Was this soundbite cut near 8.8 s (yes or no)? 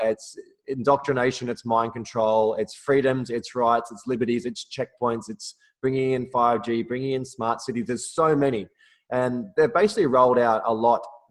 no